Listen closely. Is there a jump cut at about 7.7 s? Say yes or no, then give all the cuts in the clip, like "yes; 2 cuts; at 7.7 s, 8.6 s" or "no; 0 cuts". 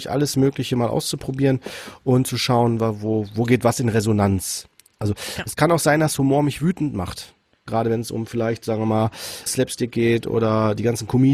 yes; 2 cuts; at 7.7 s, 9.5 s